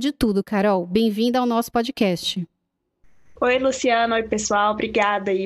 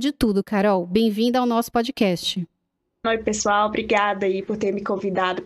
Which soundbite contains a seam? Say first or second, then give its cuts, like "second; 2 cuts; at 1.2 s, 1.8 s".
second; 1 cut; at 3.0 s